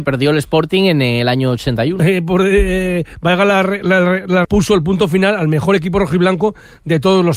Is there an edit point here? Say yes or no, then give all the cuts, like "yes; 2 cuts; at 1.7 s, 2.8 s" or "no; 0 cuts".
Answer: yes; 2 cuts; at 2.0 s, 4.4 s